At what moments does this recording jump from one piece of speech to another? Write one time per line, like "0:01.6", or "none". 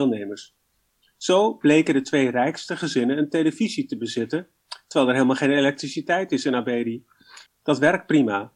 0:07.5